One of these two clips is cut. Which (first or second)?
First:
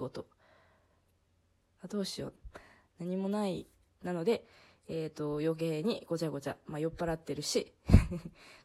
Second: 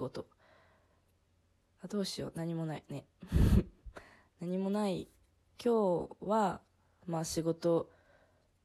first